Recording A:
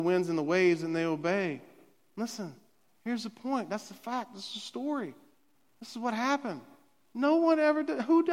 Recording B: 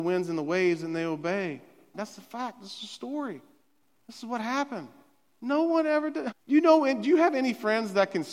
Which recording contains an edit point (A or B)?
B